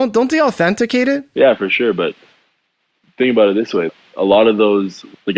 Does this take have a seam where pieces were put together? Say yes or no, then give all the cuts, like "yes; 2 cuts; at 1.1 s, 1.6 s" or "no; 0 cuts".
no; 0 cuts